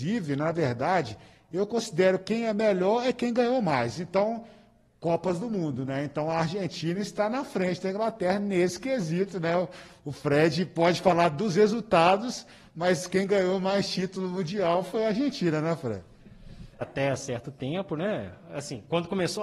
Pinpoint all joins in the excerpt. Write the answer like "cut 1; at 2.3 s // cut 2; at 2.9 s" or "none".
cut 1; at 16.8 s